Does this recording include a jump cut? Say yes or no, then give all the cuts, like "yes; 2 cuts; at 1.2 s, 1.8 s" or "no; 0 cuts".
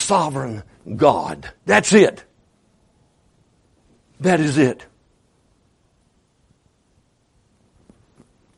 yes; 1 cut; at 1.6 s